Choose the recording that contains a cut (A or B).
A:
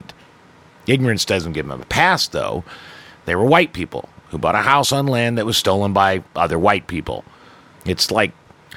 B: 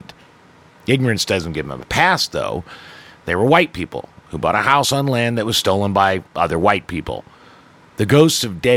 A